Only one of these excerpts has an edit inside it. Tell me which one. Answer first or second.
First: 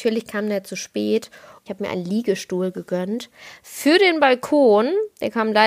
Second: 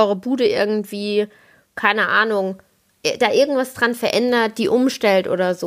first